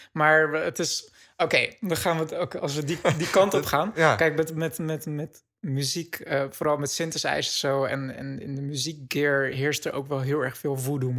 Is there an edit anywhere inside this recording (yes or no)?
no